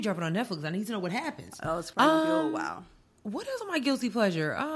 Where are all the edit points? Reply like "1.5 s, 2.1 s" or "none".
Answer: 1.9 s, 3.6 s